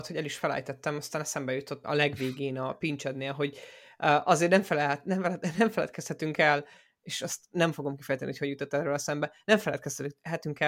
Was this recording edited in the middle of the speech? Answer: yes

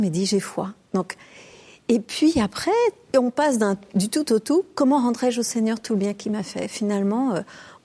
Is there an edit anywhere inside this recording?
no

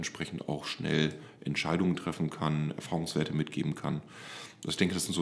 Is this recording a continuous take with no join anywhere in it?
yes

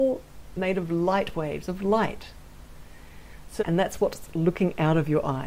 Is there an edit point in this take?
yes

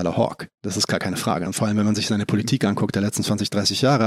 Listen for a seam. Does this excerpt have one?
no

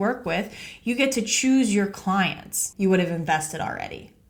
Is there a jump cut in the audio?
yes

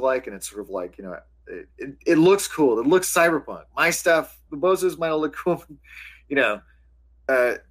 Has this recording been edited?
yes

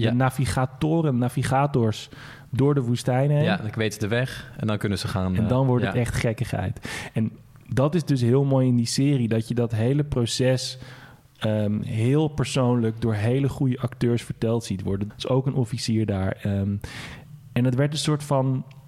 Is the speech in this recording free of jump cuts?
no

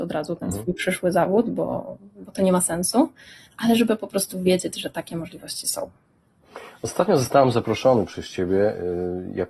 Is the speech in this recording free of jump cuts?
yes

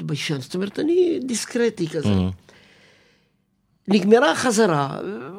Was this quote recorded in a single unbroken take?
yes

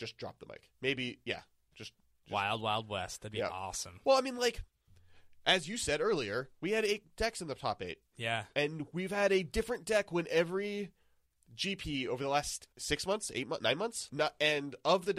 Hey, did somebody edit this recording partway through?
yes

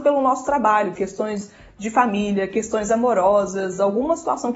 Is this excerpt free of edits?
no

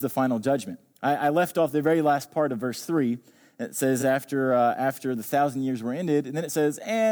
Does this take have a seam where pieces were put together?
no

